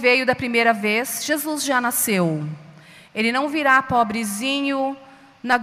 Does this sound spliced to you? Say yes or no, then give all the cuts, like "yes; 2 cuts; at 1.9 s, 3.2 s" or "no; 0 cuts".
no; 0 cuts